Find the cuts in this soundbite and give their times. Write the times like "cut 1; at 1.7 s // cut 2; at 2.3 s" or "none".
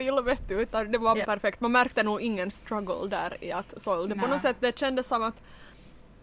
cut 1; at 1.2 s